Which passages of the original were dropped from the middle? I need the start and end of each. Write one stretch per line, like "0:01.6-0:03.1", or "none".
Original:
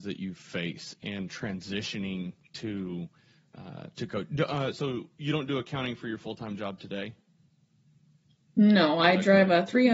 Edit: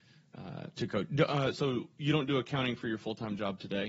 none